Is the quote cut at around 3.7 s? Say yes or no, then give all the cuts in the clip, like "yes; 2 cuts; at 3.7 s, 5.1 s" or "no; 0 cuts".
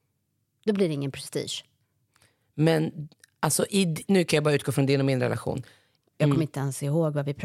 no; 1 cut; at 6.1 s